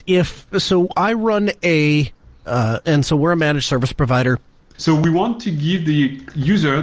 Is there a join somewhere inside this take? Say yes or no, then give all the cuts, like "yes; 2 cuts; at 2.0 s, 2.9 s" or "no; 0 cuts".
yes; 2 cuts; at 2.8 s, 4.7 s